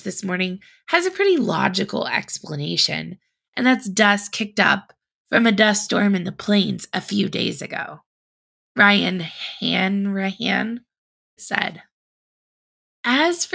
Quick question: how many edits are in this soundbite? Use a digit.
1